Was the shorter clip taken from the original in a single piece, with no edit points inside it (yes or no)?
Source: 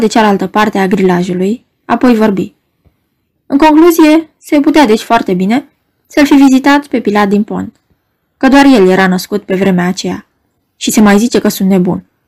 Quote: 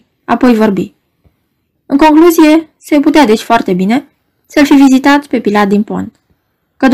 yes